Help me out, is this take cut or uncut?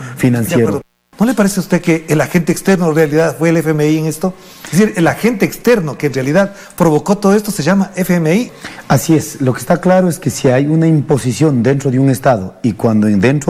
uncut